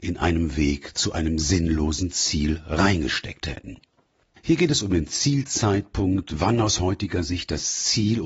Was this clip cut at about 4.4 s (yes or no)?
yes